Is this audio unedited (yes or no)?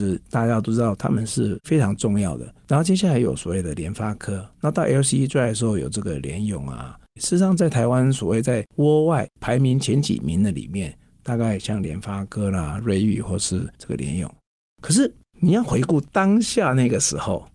no